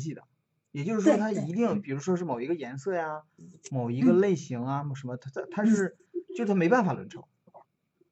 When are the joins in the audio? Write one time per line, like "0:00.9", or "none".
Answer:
none